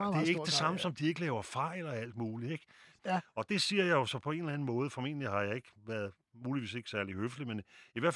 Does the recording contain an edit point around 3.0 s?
yes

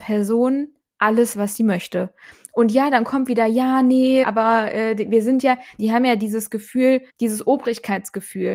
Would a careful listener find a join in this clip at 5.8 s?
yes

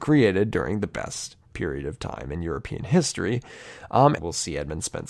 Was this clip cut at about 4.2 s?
yes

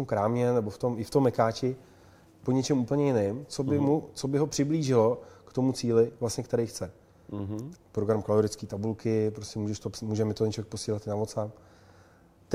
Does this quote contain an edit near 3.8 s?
no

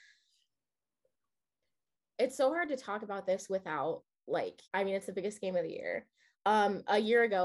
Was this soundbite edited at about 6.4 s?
no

